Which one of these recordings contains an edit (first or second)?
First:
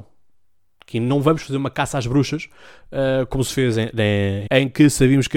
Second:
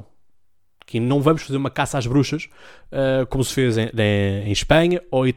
first